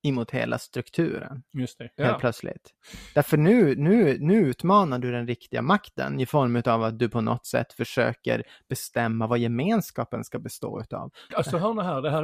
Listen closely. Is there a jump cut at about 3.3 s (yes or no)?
no